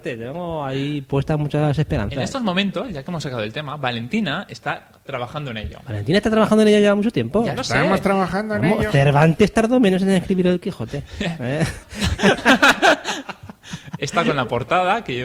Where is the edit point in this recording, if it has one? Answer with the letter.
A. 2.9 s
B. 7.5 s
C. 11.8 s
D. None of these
C